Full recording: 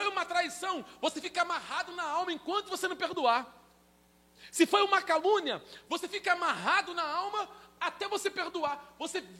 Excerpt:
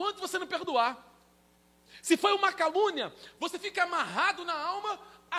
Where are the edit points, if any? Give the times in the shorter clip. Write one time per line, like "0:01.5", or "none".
none